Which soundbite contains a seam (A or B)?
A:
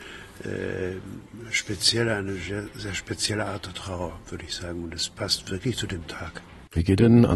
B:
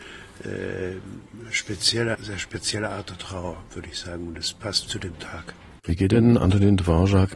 B